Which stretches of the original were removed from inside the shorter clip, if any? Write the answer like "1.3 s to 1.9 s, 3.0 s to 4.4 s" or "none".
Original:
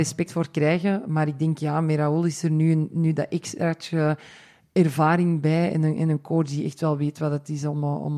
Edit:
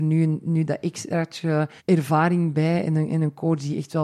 4.3 s to 4.7 s